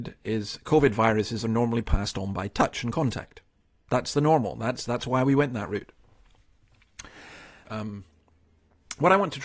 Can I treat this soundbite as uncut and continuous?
no; 1 cut; at 7.6 s

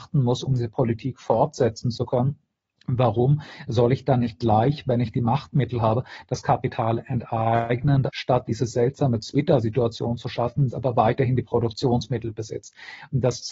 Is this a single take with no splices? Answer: no; 2 cuts; at 8.1 s, 10.7 s

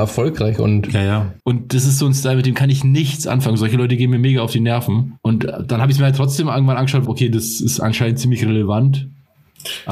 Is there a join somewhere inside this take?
yes; 2 cuts; at 1.4 s, 7.1 s

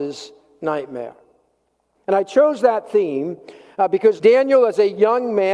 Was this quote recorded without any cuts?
no; 2 cuts; at 1.9 s, 4.2 s

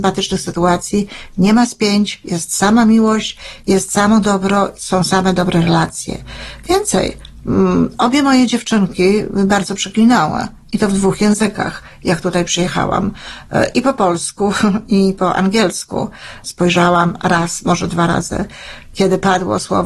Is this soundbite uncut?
no; 1 cut; at 16.4 s

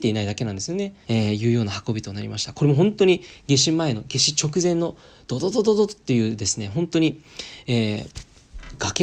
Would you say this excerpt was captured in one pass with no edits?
no; 1 cut; at 1.0 s

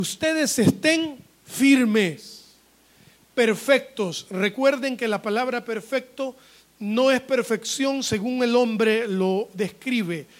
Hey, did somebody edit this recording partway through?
no; 0 cuts

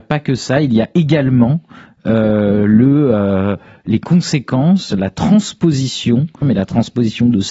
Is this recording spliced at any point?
yes; 1 cut; at 6.4 s

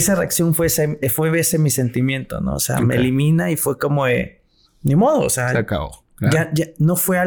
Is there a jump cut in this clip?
yes; 1 cut; at 4.6 s

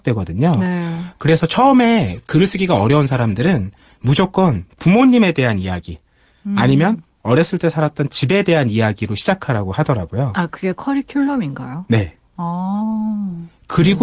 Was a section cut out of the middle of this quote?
no; 0 cuts

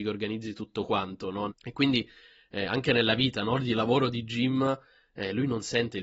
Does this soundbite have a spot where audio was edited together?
yes; 1 cut; at 1.5 s

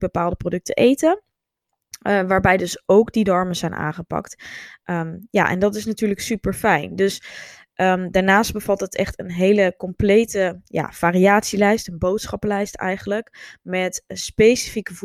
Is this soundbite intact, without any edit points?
yes; 0 cuts

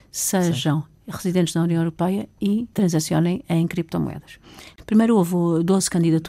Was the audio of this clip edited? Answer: yes; 2 cuts; at 2.7 s, 4.7 s

